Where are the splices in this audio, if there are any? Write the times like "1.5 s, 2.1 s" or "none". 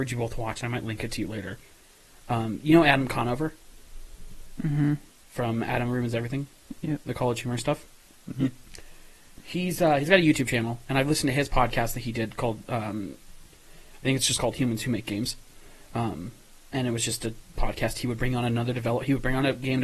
none

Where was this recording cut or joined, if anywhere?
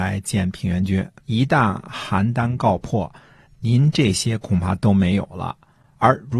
1.2 s

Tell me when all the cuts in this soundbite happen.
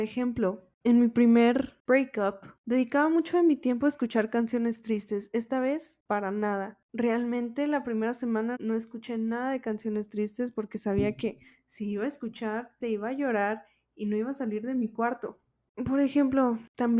8.6 s, 12.8 s, 15.7 s

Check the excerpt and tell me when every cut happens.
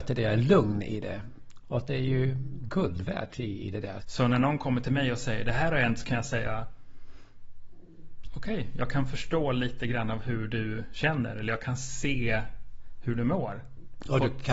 1.6 s, 4.0 s

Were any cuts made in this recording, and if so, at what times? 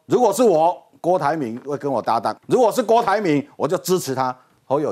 2.4 s

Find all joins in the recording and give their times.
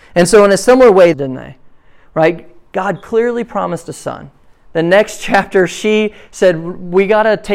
1.1 s

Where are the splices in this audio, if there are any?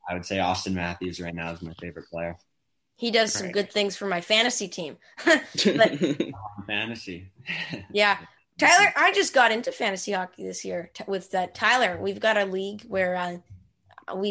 none

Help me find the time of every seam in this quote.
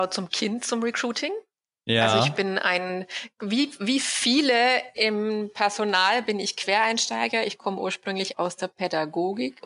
none

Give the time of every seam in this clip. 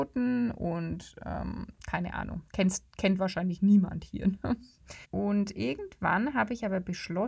5.0 s

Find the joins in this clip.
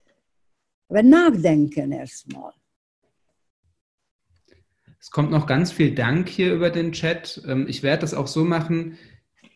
none

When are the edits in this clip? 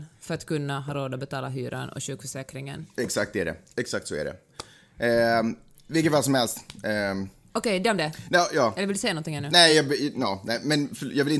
none

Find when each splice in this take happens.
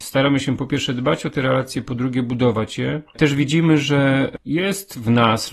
none

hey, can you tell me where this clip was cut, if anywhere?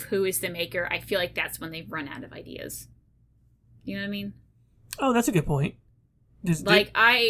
none

